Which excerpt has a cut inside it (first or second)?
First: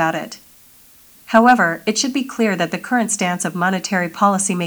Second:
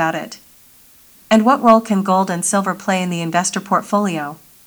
first